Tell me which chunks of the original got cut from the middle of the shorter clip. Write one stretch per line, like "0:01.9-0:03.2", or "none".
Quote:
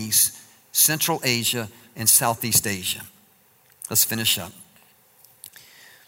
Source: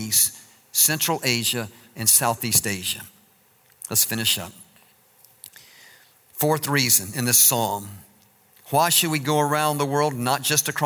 none

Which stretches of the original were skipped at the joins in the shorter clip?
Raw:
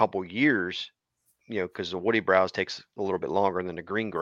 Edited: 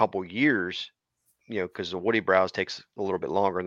none

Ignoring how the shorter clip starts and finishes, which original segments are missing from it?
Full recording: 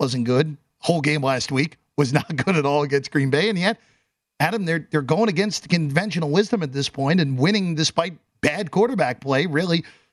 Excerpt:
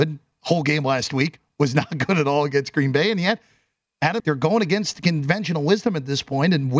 0:04.6-0:04.9

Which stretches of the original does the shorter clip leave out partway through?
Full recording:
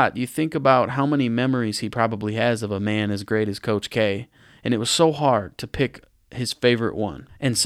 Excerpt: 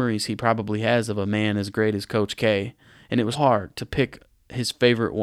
0:04.9-0:05.1

